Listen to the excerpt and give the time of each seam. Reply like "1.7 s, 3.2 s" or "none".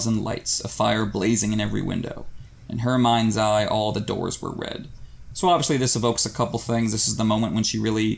none